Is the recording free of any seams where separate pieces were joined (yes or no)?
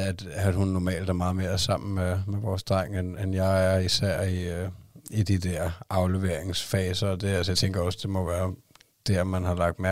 yes